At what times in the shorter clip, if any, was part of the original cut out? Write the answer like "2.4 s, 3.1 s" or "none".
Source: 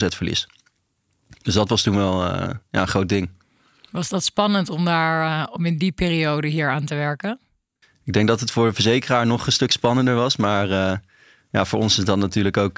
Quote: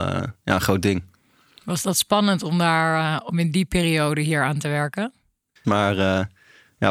5.6 s